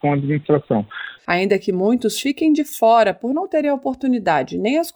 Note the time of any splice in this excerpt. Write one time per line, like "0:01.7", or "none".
0:01.2